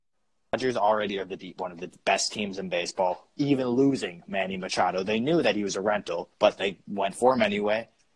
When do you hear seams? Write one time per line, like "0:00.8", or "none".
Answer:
0:06.3